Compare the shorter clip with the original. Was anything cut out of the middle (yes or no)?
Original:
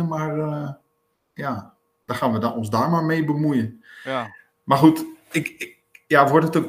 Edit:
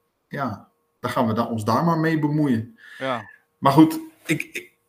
no